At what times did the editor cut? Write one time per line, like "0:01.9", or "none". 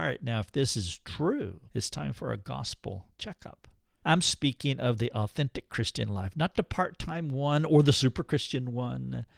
0:01.7
0:04.0